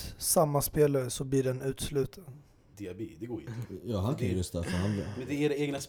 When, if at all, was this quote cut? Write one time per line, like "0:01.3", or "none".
0:02.7